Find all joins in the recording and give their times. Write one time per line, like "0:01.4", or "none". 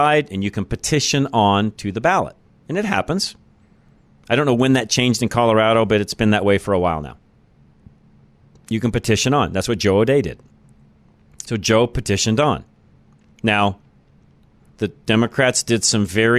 none